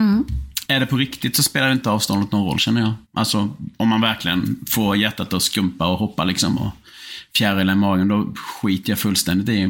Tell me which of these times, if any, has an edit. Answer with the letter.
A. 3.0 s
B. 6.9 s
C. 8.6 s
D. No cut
A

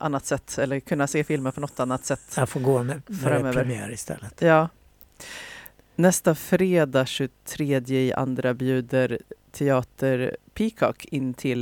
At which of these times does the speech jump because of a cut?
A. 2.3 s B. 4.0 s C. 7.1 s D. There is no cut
D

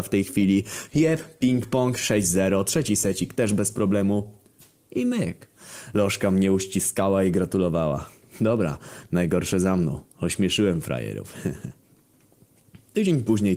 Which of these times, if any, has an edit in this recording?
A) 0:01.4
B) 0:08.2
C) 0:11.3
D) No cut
D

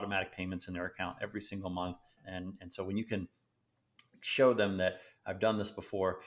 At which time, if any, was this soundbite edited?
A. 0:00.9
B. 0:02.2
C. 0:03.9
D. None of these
B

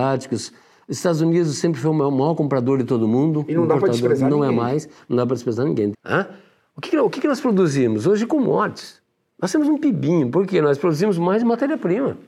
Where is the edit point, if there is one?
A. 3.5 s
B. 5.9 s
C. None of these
B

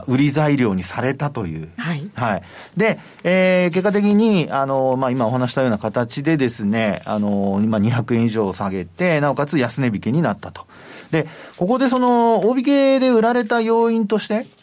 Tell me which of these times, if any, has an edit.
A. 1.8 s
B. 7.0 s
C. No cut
A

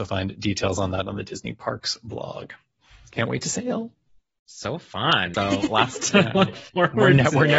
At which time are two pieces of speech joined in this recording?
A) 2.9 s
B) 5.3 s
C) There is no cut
B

